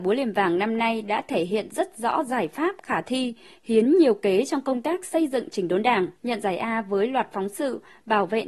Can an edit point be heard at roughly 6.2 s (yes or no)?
yes